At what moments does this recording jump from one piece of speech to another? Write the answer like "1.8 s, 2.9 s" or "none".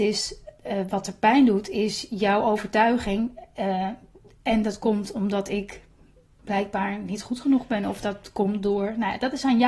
none